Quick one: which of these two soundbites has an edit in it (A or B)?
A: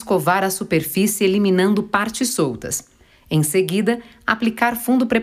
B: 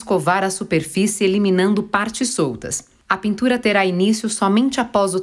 B